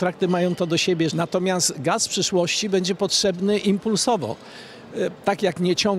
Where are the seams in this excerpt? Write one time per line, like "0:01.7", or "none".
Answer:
0:01.1

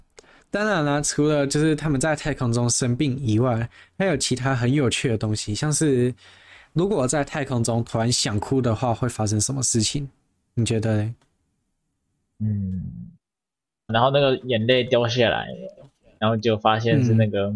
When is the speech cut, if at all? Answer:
0:13.9

